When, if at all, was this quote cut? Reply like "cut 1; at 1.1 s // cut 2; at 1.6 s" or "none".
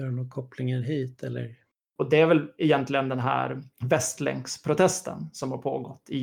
cut 1; at 1.9 s // cut 2; at 3.7 s